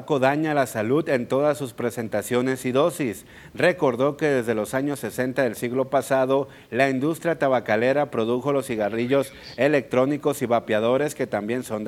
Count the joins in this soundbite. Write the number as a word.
zero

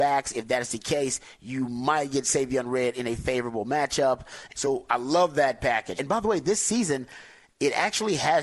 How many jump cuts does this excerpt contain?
two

